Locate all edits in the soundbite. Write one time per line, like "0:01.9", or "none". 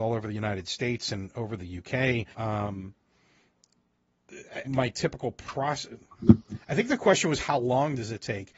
0:02.3
0:04.6